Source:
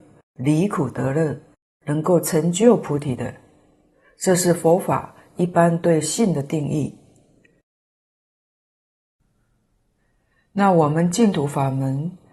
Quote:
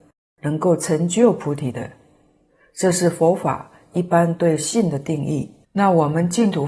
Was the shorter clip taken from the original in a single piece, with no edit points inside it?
no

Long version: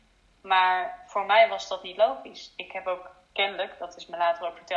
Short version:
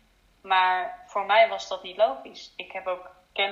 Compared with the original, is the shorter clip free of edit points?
yes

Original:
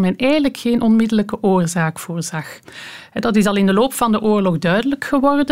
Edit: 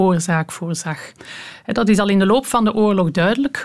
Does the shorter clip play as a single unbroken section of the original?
yes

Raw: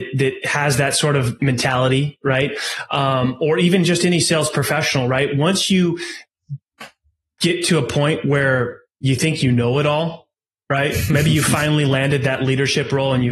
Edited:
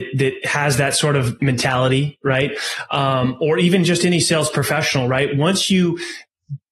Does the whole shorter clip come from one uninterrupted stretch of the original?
yes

